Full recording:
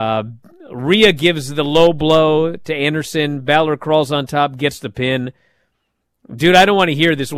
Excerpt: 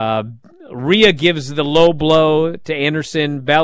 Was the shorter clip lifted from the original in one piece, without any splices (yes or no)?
yes